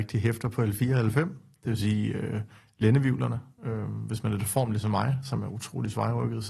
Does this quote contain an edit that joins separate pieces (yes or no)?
yes